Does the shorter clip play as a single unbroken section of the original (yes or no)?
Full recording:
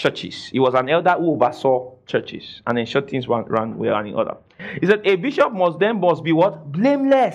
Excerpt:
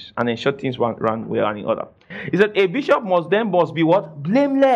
yes